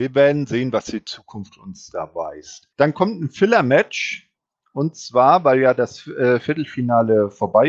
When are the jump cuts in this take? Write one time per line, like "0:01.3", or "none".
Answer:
0:02.7